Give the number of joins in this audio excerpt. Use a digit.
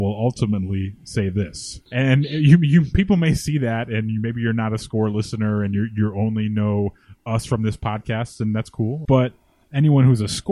2